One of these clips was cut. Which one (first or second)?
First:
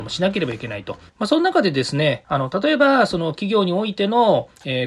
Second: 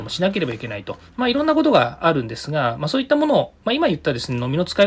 first